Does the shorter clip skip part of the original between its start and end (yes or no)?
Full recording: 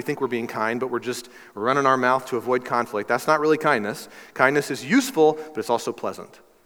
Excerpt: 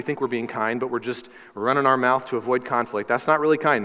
no